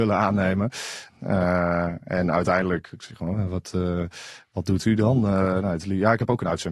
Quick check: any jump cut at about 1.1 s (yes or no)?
yes